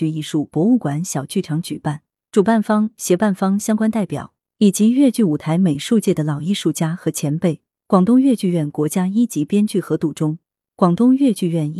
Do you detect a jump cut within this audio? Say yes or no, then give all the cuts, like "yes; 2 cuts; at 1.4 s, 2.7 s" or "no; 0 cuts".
no; 0 cuts